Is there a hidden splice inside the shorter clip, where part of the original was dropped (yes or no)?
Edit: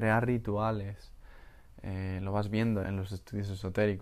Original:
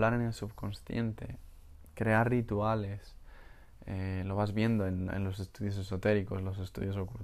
yes